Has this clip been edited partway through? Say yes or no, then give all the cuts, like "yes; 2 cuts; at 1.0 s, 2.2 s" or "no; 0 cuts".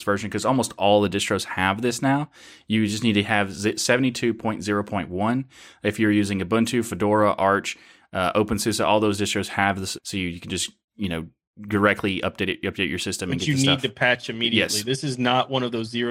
yes; 1 cut; at 10.0 s